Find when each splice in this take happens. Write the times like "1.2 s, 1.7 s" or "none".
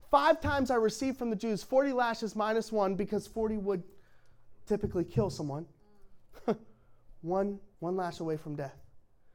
7.7 s